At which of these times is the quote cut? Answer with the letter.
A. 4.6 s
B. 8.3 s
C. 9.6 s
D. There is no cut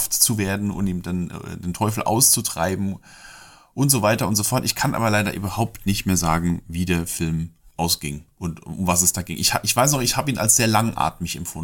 B